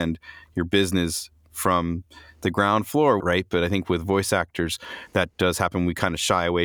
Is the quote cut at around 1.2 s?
no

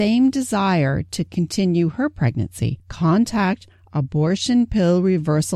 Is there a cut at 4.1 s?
no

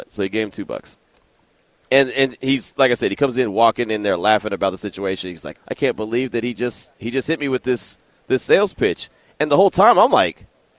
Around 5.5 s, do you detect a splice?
yes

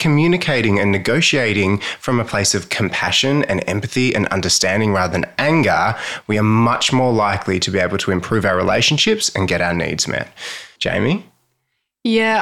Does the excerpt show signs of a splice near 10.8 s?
yes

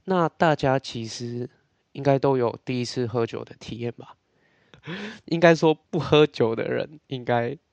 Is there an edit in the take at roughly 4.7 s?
yes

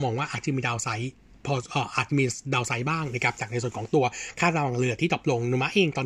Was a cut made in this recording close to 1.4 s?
no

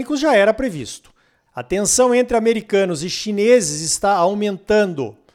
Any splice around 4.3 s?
no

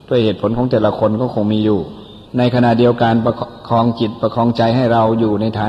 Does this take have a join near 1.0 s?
no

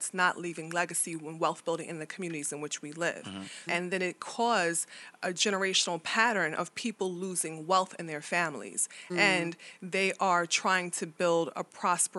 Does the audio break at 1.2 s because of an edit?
no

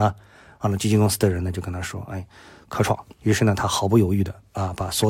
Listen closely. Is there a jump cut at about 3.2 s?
yes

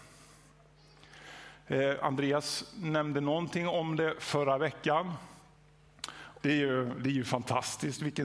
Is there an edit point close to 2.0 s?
no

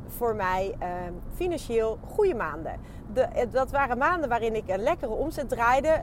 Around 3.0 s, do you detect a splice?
no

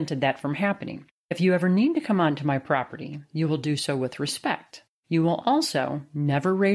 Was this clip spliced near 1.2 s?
yes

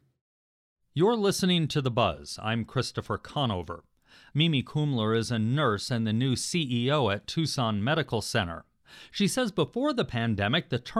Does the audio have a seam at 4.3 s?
yes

